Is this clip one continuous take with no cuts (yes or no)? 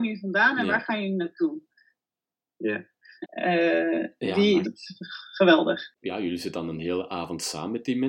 no